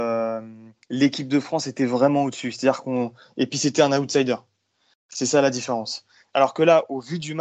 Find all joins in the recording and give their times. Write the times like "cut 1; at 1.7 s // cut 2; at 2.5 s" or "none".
cut 1; at 6.3 s